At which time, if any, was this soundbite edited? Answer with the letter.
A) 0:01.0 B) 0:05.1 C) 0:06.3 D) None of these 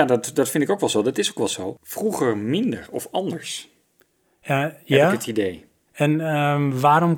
D